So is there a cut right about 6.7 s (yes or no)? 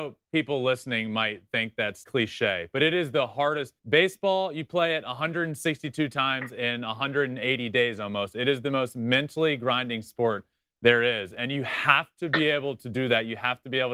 no